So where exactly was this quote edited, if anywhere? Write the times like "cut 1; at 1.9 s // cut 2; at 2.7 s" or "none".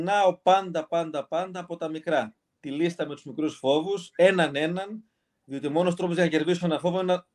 none